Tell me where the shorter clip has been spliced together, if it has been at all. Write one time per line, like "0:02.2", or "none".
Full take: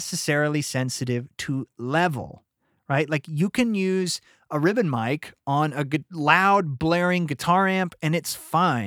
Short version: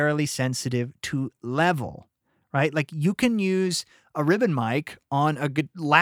none